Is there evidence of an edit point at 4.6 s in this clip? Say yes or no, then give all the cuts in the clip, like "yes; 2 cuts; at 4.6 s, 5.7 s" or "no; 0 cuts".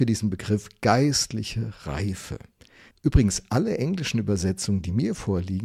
no; 1 cut; at 2.9 s